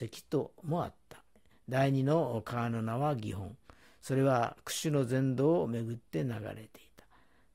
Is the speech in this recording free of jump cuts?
yes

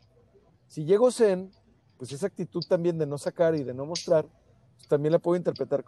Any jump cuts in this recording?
no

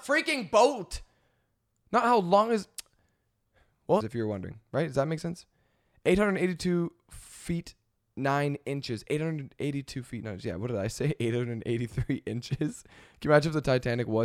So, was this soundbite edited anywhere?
yes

